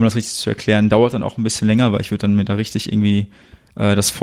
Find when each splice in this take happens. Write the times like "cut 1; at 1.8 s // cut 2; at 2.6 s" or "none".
none